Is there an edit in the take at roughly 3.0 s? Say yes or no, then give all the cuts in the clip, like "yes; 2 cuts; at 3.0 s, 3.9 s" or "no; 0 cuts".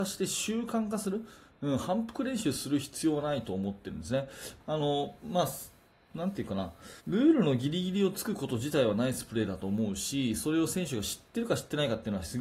no; 2 cuts; at 4.6 s, 7.0 s